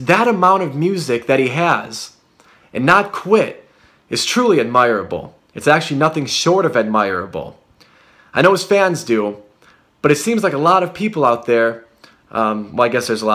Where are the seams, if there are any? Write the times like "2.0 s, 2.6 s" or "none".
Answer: 8.2 s